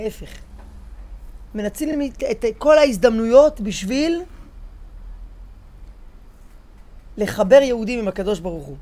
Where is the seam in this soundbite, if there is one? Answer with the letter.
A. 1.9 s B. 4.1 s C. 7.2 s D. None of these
D